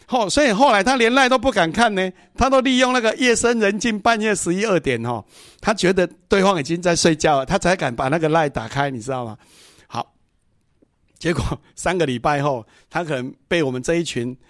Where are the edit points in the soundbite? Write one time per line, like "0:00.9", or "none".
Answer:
none